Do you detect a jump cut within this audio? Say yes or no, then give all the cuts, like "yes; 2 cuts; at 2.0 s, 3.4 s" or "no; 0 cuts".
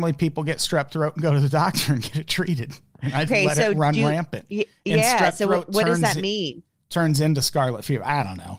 yes; 1 cut; at 3.3 s